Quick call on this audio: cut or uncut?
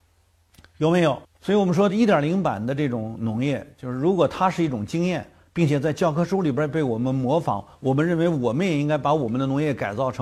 cut